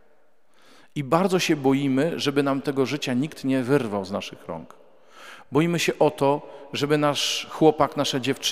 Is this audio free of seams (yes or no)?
yes